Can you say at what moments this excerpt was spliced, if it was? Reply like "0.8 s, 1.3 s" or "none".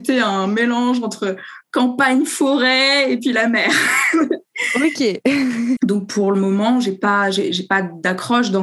5.8 s